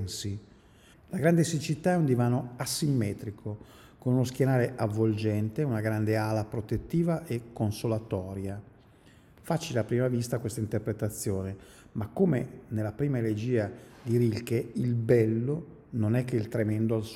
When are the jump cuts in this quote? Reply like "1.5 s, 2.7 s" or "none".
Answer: 0.9 s